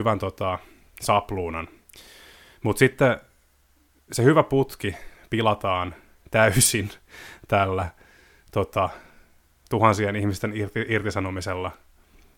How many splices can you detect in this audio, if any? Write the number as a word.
zero